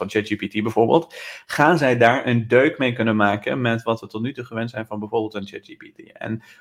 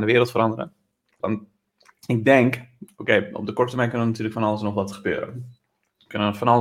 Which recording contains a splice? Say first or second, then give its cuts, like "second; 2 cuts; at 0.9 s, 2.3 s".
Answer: second; 1 cut; at 1.2 s